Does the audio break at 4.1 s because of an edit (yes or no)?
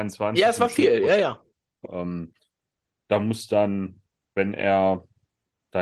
no